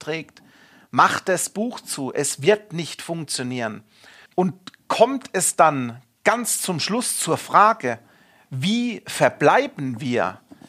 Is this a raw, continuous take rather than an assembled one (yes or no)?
no